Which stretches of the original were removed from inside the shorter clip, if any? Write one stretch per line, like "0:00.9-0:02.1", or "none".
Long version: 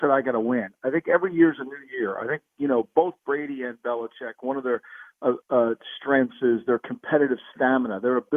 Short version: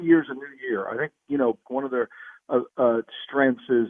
0:02.9-0:04.3

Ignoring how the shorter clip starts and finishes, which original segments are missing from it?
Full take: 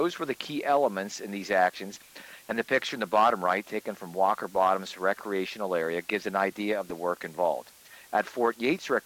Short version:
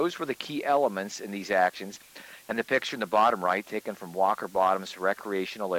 none

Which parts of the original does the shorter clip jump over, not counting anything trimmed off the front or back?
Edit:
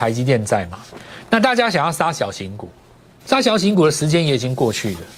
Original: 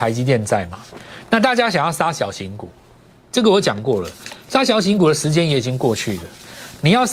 0:03.2-0:04.4

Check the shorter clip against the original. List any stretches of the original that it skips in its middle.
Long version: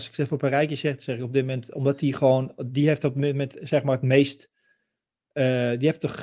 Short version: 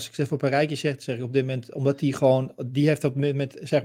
none

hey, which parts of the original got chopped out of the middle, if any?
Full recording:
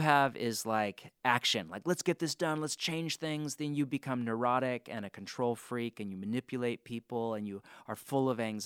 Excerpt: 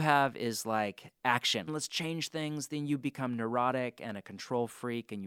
0:01.7-0:02.6

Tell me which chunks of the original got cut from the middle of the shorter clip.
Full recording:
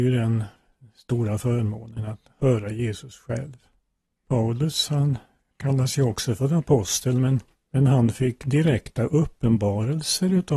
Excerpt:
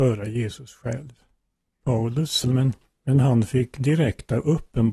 0:04.9-0:07.1

